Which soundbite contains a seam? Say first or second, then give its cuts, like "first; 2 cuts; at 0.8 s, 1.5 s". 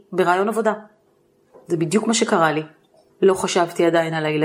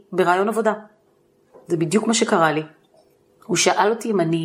first; 1 cut; at 3.1 s